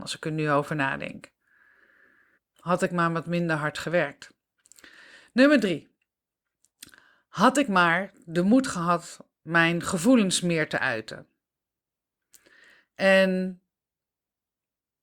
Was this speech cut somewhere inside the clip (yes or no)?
yes